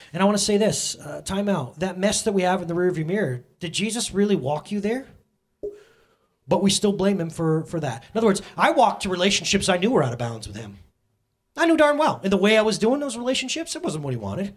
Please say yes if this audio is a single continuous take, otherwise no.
no